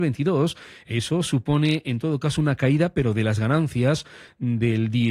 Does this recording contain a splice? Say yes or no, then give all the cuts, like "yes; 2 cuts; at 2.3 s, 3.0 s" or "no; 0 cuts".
no; 0 cuts